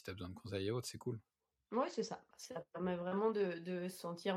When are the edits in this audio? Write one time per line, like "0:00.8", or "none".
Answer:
0:02.3